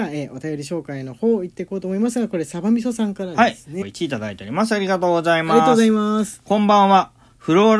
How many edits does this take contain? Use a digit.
1